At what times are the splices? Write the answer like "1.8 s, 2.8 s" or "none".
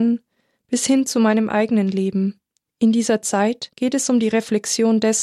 2.7 s, 3.7 s

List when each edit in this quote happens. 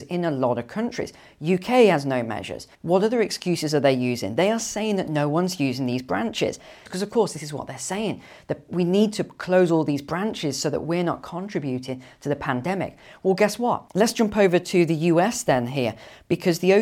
2.7 s, 6.9 s, 13.9 s

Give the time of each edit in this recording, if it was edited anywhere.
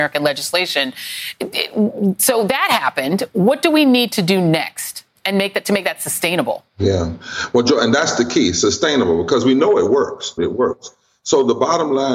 6.7 s, 10.4 s

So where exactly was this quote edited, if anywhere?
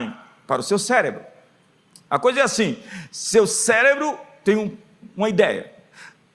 none

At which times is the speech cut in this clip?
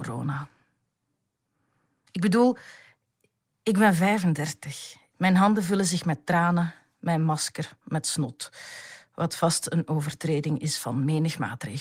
5.1 s

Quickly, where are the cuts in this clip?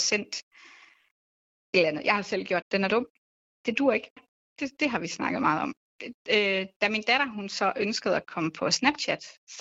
2.6 s, 5.9 s

